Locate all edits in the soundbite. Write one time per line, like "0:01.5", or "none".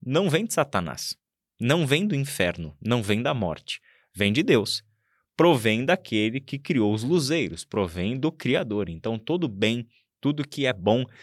none